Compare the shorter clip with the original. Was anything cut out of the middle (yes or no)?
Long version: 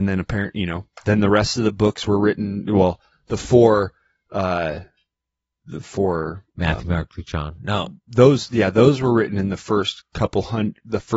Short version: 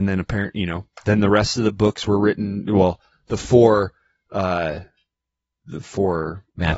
no